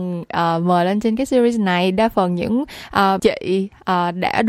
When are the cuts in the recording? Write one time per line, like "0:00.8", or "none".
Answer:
0:03.2

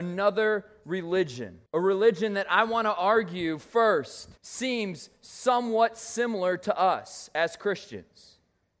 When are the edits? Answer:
0:01.7
0:04.4

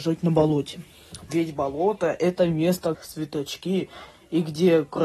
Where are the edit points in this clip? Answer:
0:01.3
0:02.9

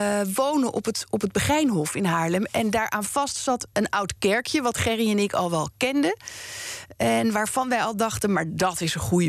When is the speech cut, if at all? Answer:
0:03.7

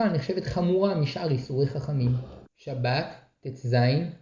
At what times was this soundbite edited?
0:02.5

